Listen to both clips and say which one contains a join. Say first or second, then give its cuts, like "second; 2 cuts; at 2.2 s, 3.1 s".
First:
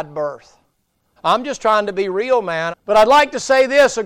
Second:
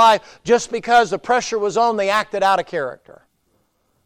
first; 2 cuts; at 1.2 s, 2.7 s